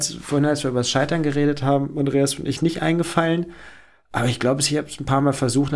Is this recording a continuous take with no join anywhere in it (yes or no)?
yes